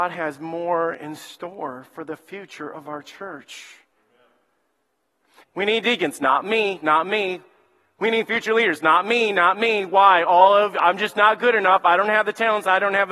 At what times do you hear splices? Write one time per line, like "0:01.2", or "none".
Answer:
0:05.4